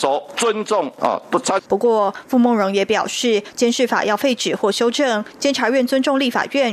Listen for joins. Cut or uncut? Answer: cut